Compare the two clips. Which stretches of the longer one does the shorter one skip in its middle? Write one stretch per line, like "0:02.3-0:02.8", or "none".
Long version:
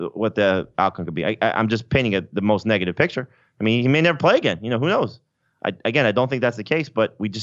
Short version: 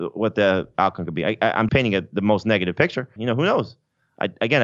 0:01.7-0:01.9
0:03.4-0:04.6